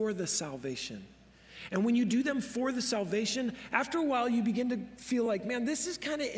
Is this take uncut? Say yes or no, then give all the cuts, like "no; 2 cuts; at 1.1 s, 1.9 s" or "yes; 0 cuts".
yes; 0 cuts